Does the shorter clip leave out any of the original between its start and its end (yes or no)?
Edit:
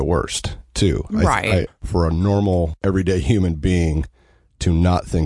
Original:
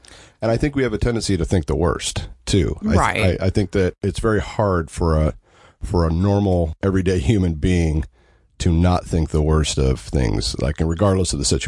yes